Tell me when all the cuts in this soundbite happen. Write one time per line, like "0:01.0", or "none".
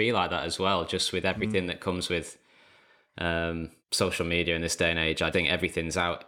0:03.8
0:05.3